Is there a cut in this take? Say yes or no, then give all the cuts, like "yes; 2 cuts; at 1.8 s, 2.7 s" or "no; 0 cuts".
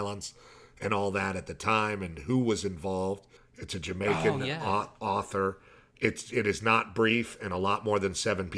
yes; 1 cut; at 3.4 s